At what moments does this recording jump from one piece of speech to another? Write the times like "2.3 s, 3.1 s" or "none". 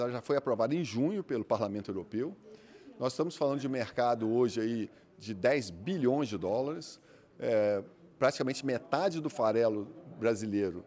none